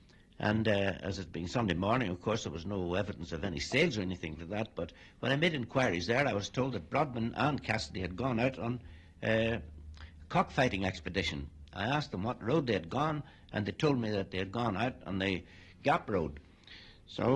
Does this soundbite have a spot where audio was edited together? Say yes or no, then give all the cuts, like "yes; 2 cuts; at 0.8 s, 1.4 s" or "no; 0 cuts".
no; 0 cuts